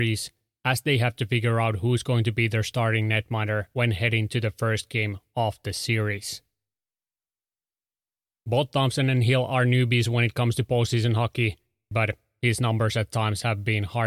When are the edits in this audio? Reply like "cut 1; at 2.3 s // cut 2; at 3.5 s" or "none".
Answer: cut 1; at 11.9 s

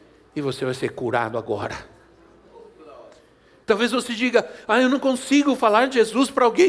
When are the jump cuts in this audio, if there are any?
cut 1; at 3.6 s

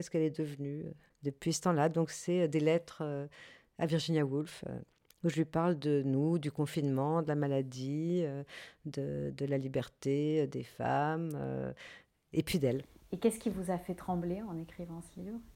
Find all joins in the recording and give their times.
none

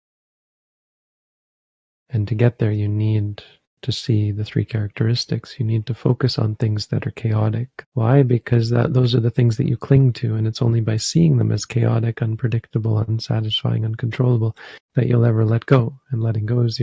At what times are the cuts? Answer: cut 1; at 7.8 s

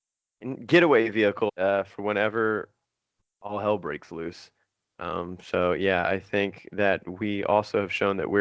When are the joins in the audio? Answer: cut 1; at 1.5 s

